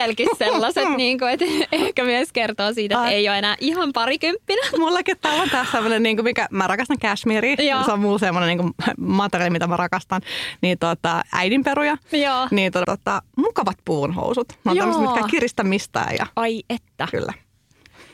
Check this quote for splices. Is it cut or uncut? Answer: cut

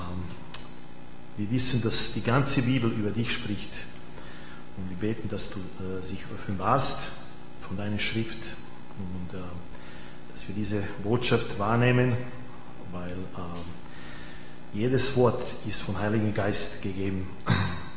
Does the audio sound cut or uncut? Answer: uncut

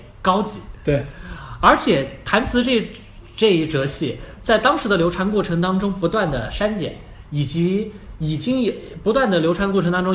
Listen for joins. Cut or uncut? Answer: uncut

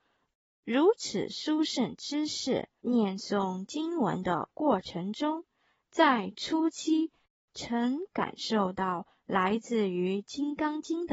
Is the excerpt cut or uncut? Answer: cut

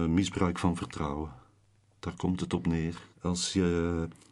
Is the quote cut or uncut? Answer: cut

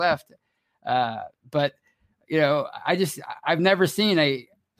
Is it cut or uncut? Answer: uncut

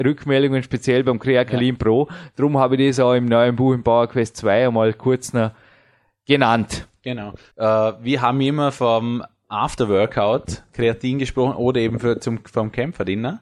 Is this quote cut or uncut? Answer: cut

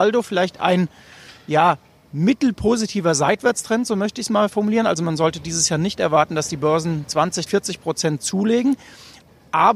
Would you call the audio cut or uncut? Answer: cut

